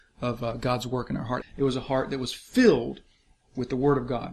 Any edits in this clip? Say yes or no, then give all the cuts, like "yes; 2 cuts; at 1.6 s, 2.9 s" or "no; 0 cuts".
yes; 1 cut; at 1.4 s